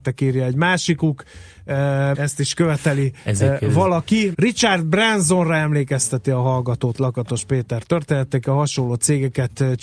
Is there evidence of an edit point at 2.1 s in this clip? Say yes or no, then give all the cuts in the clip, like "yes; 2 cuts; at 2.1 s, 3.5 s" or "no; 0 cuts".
yes; 2 cuts; at 2.1 s, 4.3 s